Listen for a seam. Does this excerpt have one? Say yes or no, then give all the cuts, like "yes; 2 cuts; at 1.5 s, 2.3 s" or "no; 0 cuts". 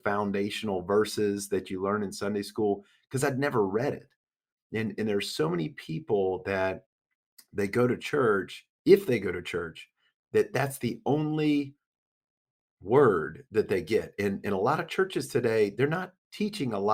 no; 0 cuts